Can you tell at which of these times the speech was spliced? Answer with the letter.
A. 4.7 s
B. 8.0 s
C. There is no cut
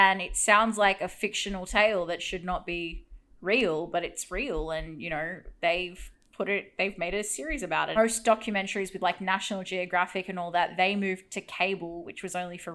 B